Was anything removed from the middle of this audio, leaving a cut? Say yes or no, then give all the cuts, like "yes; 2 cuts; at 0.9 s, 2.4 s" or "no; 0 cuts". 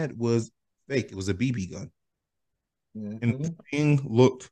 no; 0 cuts